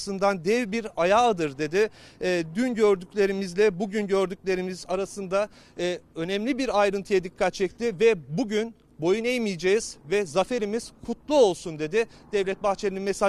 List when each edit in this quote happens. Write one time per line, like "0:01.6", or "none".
none